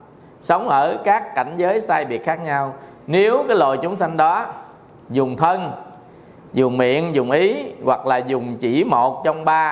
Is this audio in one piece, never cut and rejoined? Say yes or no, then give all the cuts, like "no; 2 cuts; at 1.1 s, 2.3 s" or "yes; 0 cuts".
yes; 0 cuts